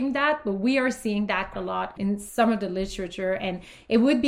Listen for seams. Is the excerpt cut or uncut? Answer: cut